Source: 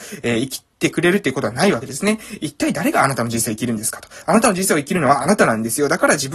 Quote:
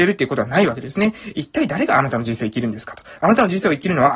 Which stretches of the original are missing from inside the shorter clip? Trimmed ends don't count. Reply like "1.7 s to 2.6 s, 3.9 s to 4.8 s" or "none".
none